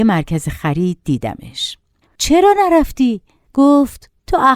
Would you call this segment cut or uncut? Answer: cut